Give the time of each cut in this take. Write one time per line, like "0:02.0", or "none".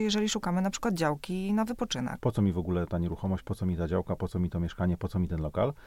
0:02.2